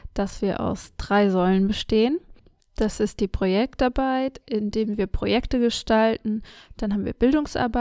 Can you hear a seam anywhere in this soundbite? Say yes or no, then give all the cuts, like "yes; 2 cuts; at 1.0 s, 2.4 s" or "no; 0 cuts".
no; 0 cuts